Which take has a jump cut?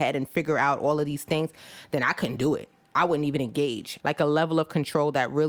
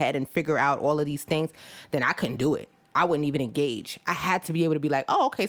first; 1 cut; at 4.0 s

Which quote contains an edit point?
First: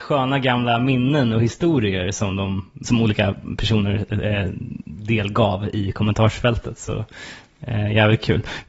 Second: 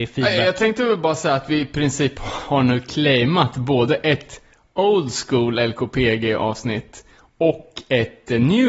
first; 1 cut; at 2.8 s

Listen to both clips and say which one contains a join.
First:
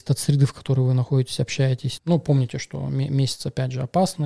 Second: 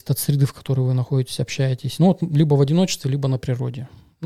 first; 1 cut; at 2.0 s

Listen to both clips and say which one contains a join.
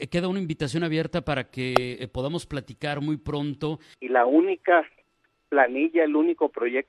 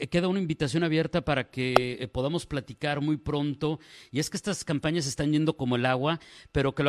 first; 1 cut; at 3.9 s

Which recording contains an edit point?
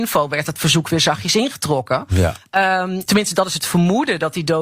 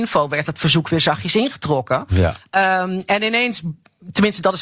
first; 1 cut; at 3.1 s

